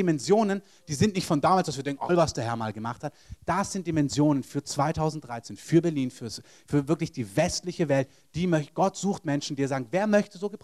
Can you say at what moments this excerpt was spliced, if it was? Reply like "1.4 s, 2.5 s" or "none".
2.1 s